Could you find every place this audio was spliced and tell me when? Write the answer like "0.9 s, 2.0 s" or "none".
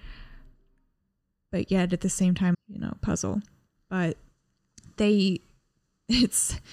2.5 s